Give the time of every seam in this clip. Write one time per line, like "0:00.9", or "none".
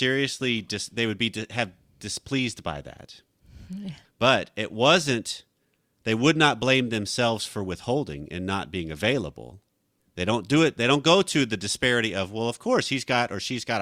0:04.0
0:10.0

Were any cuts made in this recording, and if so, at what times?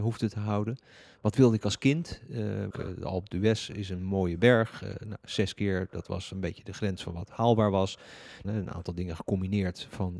0:02.7
0:08.4

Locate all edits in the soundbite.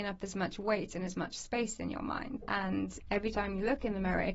0:02.4

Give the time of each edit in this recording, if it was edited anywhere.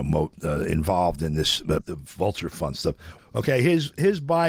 0:01.8
0:03.2

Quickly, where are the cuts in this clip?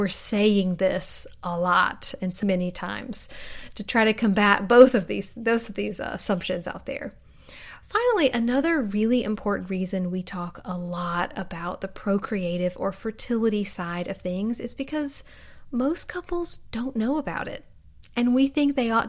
0:02.4

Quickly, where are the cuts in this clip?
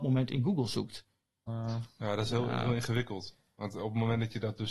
0:01.5

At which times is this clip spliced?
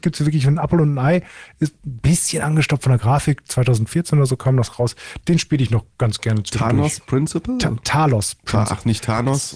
0:05.2

